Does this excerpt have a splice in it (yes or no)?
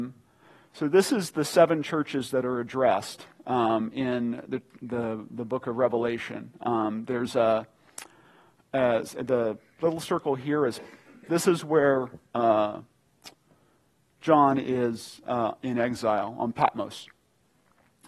no